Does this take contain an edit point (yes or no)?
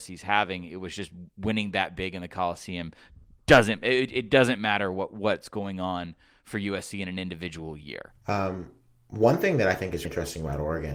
yes